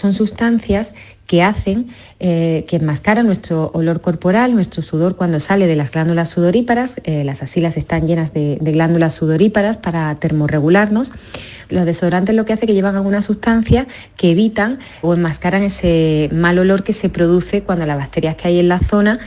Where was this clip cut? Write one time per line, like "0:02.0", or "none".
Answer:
0:11.7
0:15.0